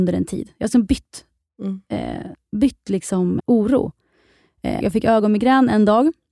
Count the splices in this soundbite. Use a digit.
2